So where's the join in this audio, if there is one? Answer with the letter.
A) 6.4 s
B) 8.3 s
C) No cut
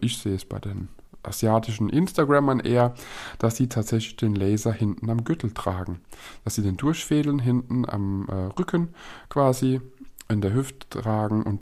C